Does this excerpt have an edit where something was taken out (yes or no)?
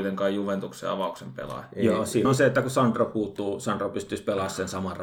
no